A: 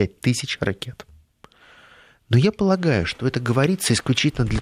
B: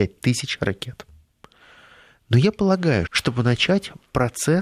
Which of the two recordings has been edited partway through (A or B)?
B